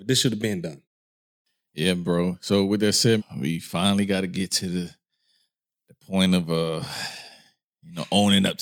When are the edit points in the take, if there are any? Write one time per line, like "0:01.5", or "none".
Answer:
0:03.2